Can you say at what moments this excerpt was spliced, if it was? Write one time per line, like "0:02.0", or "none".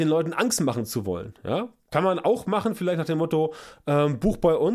none